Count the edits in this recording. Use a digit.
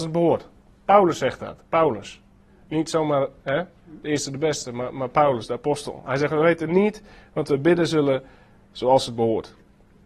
0